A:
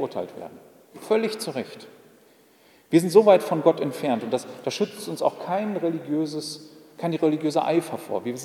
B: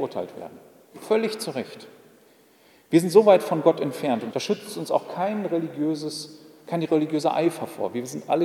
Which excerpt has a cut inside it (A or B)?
B